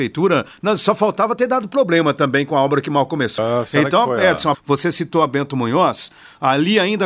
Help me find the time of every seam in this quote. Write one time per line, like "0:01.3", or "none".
0:03.4
0:04.5